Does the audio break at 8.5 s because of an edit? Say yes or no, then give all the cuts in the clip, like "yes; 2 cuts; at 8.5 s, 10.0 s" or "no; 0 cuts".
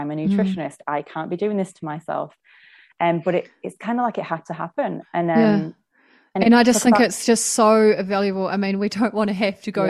no; 0 cuts